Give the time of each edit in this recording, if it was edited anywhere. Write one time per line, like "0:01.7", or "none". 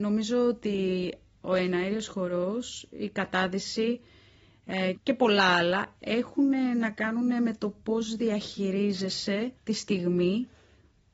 0:04.9
0:09.6

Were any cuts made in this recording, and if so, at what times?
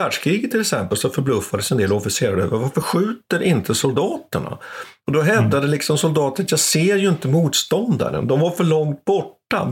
none

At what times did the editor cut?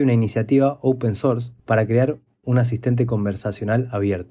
0:01.6

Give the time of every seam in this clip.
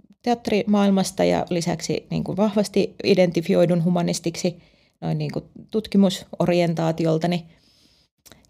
none

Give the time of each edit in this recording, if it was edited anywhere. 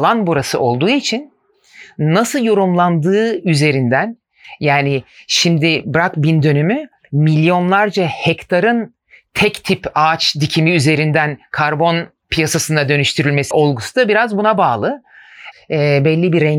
0:13.5
0:15.5

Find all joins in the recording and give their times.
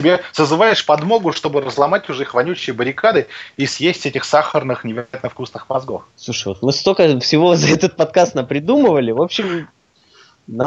0:06.1

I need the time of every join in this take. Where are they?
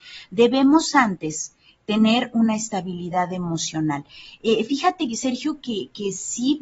none

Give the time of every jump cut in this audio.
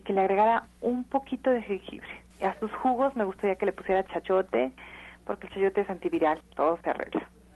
0:02.3
0:06.4

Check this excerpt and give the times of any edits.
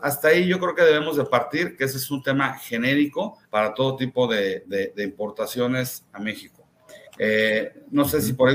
0:03.4
0:07.1

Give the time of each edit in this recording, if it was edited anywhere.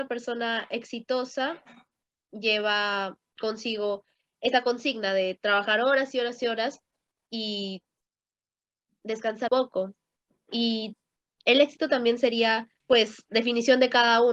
0:09.5
0:12.8

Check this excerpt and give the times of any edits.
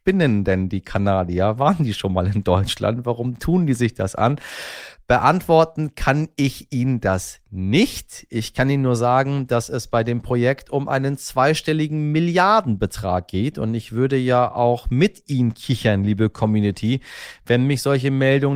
none

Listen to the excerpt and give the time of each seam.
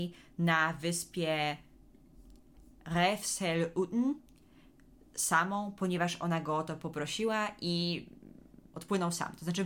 0:08.7

